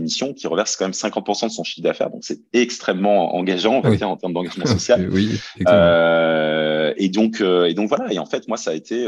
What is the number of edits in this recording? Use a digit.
0